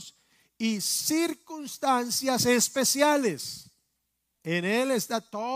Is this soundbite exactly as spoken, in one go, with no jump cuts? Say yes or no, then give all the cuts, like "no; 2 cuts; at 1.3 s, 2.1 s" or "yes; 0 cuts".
no; 1 cut; at 4.4 s